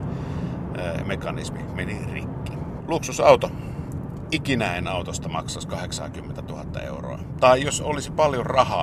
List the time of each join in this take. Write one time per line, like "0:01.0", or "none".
0:02.8

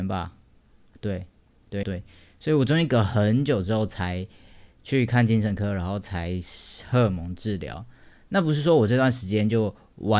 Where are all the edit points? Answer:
0:01.8

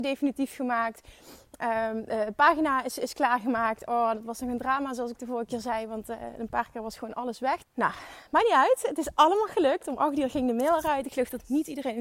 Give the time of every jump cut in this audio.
0:07.6

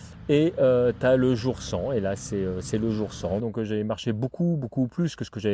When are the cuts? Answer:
0:03.4

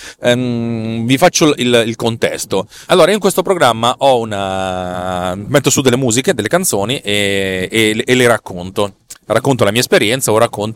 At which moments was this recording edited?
0:02.9

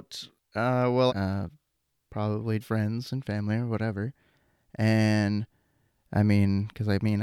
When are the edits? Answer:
0:01.1
0:02.6

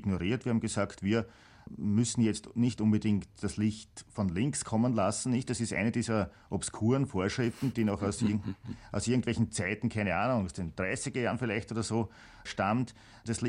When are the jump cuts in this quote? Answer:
none

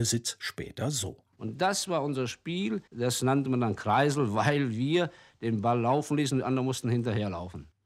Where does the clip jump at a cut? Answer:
none

